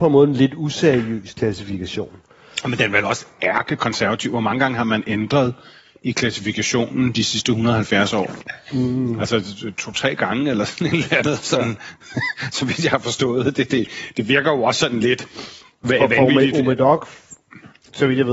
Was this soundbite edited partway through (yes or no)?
no